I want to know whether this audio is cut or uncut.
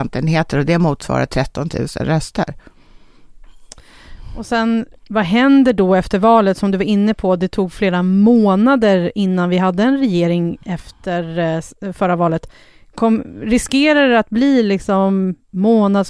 cut